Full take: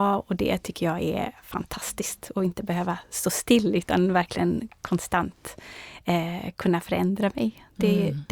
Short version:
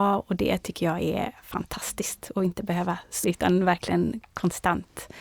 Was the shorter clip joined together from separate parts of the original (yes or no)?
yes